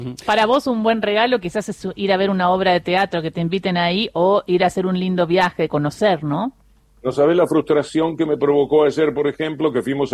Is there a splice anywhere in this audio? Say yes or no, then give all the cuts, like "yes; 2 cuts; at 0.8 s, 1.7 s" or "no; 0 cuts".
no; 0 cuts